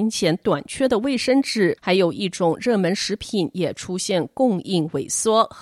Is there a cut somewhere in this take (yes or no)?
yes